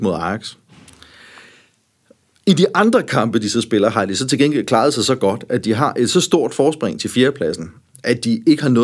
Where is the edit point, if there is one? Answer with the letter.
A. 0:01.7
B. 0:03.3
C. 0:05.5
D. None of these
D